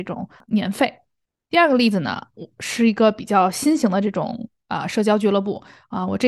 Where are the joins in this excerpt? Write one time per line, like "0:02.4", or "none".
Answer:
none

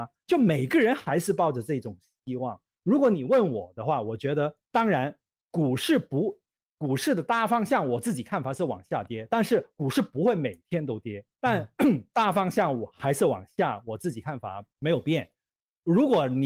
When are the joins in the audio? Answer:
0:04.6
0:11.3
0:14.7

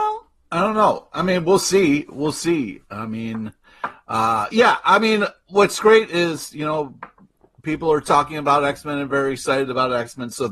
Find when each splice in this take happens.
none

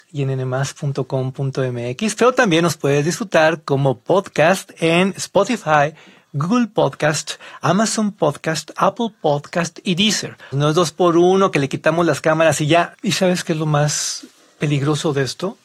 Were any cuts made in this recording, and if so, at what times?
0:10.5
0:12.9

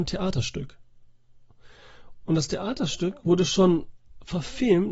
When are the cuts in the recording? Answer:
0:02.2

